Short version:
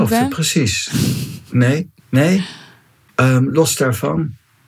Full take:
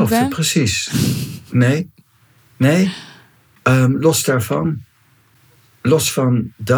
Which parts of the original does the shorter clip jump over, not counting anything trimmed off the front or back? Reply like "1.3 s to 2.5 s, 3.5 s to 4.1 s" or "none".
2.0 s to 2.5 s